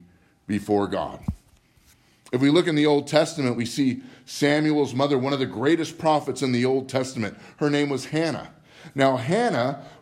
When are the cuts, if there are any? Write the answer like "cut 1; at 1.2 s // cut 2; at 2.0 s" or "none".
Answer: none